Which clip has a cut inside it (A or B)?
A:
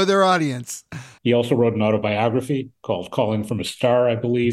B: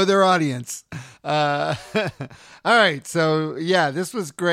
A